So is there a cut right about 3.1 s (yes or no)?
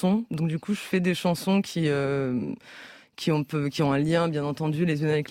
no